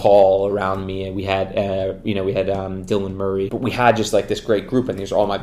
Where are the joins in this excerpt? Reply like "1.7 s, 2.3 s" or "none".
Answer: 3.5 s